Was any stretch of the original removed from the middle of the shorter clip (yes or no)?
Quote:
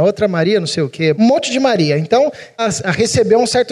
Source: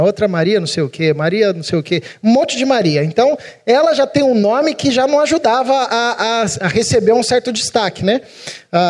yes